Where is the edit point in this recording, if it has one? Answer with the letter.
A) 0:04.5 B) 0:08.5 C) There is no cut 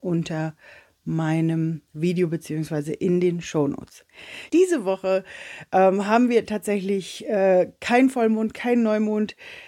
A